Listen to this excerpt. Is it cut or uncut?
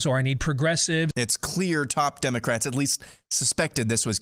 cut